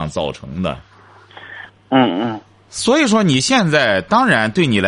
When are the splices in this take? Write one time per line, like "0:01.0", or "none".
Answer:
0:01.7